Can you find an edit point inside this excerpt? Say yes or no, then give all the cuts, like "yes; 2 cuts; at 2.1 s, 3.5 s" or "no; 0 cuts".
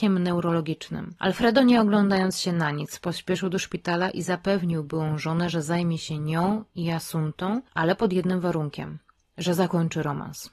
no; 0 cuts